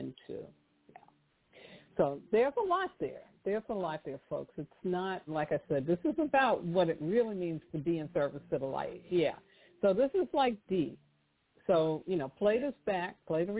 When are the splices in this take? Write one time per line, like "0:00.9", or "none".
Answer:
0:05.3